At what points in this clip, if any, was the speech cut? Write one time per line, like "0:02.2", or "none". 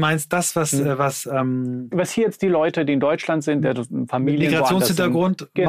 0:01.9